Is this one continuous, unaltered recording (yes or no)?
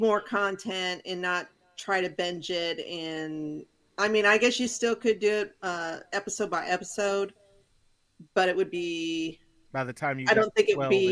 yes